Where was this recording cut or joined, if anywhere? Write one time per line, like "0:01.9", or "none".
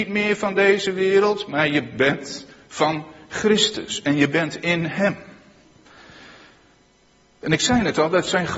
none